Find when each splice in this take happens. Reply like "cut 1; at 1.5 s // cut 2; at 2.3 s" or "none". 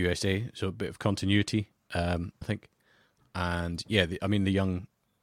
cut 1; at 2.4 s